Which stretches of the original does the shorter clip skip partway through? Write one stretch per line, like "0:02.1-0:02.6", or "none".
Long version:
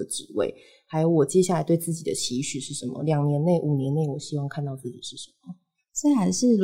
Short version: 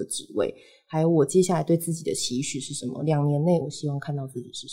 0:03.6-0:04.1